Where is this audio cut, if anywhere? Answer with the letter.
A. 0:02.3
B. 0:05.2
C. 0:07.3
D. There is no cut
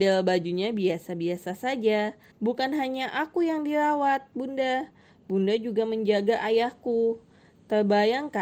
A